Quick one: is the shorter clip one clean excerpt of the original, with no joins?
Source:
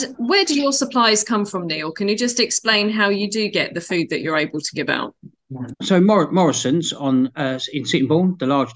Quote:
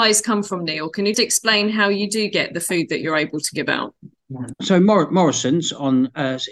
no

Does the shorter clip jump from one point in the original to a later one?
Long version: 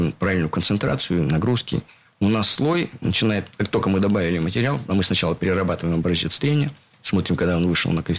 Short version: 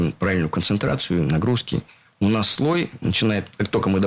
no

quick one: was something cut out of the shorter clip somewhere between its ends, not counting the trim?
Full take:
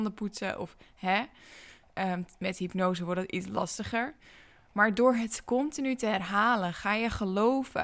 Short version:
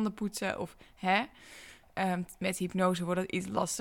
no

